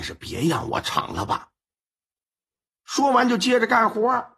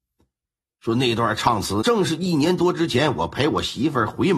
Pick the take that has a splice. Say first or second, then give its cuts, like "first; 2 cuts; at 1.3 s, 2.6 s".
second; 1 cut; at 1.8 s